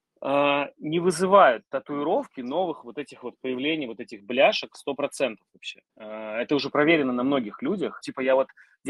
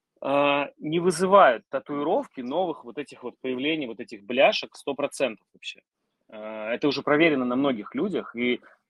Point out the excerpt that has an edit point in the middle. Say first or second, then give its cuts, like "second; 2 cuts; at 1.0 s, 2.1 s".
first; 2 cuts; at 5.9 s, 8.0 s